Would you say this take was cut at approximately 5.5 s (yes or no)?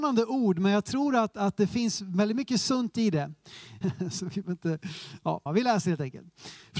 yes